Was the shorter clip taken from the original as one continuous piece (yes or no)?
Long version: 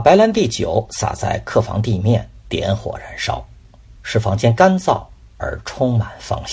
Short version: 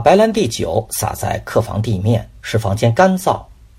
no